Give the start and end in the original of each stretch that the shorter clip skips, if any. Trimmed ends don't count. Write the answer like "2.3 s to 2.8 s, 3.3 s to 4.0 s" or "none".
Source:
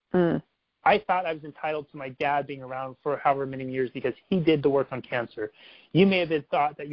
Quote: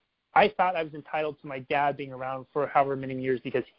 none

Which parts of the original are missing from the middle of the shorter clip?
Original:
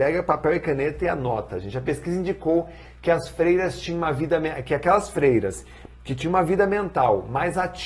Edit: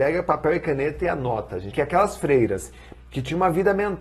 1.7 s to 4.6 s

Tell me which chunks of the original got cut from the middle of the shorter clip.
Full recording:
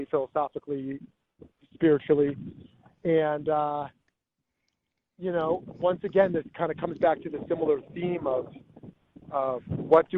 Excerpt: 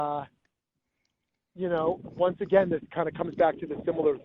none

